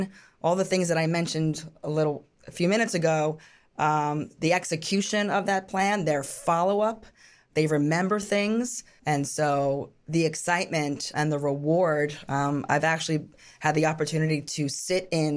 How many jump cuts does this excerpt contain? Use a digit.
2